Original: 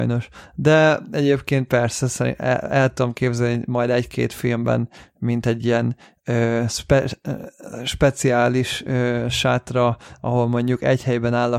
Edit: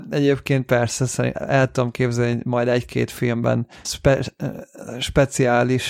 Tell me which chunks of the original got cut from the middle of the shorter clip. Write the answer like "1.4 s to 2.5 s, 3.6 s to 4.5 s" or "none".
2.4 s to 2.6 s, 5.1 s to 6.7 s